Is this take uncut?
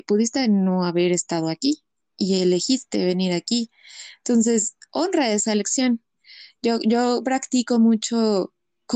yes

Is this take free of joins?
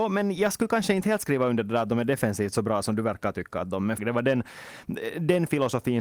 no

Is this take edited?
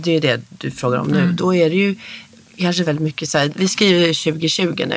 yes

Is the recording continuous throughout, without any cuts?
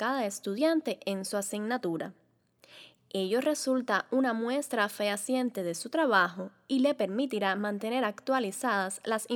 yes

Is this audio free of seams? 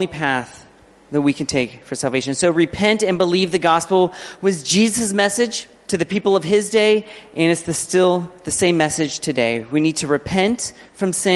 yes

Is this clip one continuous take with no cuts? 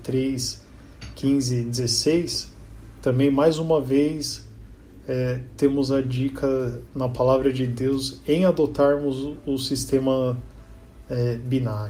yes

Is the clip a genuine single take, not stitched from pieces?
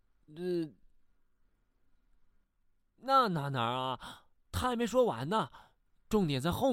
yes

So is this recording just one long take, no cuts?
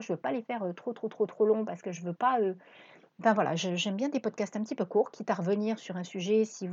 yes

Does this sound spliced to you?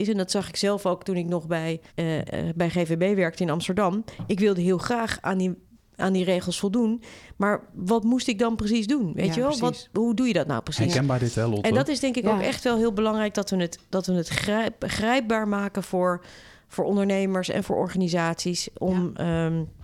yes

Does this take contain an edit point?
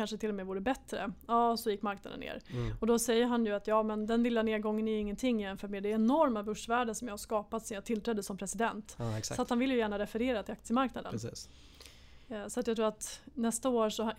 no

